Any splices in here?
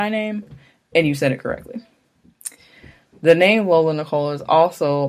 no; 0 cuts

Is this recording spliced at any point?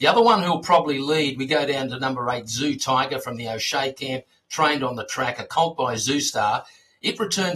no; 0 cuts

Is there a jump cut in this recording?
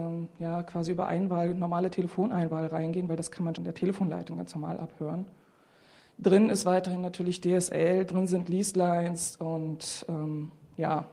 yes; 1 cut; at 3.5 s

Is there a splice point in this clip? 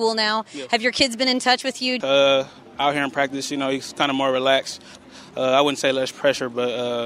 yes; 1 cut; at 2.0 s

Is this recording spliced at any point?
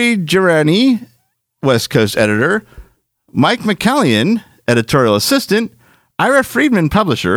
no; 0 cuts

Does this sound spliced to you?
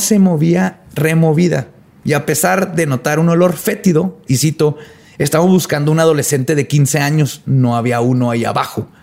yes; 1 cut; at 4.3 s

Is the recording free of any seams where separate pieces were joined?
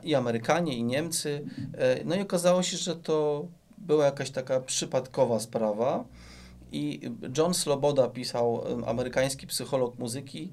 yes; 0 cuts

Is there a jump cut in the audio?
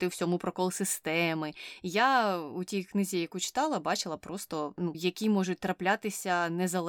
yes; 1 cut; at 4.9 s

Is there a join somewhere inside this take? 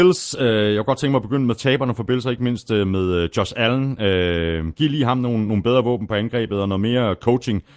no; 0 cuts

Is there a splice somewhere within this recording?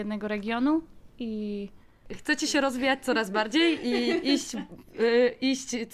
no; 0 cuts

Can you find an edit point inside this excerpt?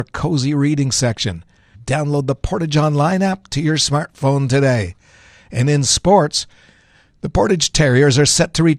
yes; 1 cut; at 1.7 s

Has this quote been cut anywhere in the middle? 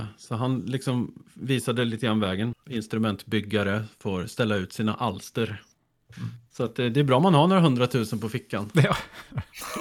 yes; 1 cut; at 2.5 s

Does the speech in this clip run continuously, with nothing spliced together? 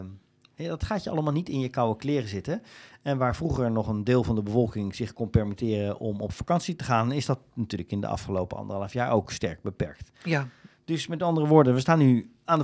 yes; 0 cuts

